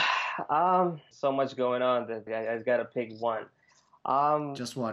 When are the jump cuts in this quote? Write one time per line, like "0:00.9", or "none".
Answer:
0:01.1
0:02.3